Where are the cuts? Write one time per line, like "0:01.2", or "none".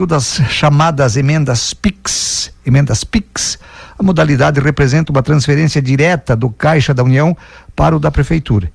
none